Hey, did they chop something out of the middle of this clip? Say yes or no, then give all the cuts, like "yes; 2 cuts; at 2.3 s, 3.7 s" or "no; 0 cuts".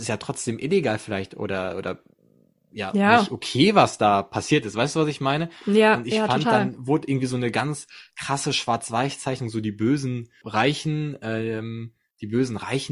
no; 0 cuts